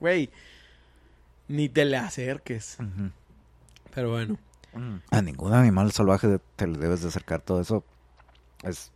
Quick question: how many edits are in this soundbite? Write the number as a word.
one